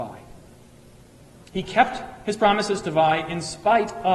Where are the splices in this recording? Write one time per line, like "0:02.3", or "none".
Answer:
none